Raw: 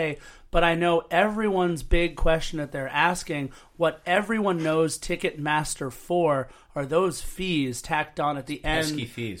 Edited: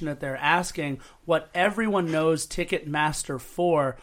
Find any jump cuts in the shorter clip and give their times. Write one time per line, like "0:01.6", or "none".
none